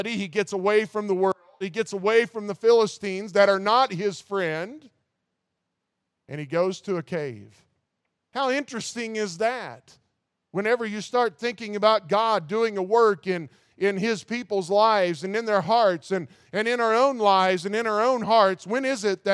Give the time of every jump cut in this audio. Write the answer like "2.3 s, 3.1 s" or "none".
none